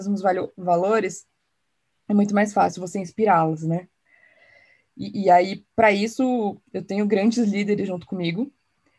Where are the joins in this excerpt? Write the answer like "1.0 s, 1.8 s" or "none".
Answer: none